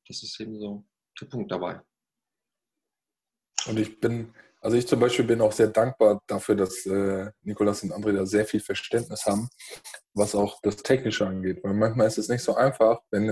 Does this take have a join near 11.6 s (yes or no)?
no